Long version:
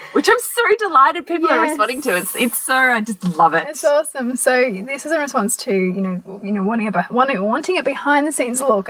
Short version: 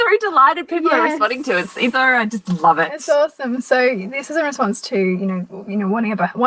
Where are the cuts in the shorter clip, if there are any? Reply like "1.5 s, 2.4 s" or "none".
1.9 s